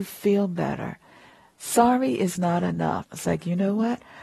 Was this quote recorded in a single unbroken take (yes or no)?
no